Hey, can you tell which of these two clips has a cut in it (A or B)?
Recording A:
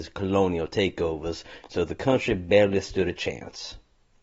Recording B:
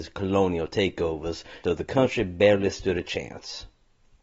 B